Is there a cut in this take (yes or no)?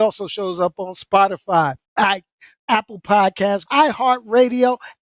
yes